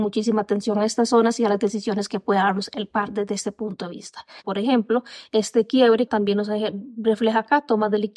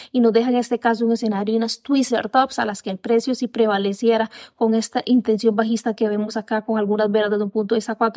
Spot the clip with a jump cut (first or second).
first